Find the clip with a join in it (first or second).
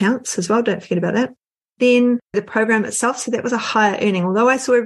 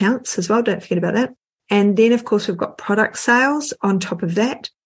second